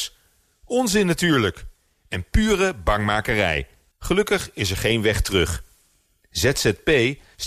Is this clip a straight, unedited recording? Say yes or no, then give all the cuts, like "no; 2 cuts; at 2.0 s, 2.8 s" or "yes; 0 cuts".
no; 1 cut; at 3.9 s